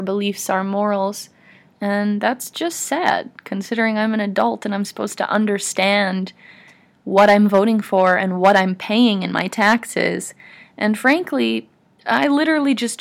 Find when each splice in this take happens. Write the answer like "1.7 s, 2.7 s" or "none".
1.7 s